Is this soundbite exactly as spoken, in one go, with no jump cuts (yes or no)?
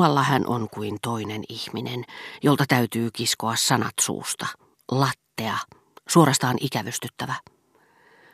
yes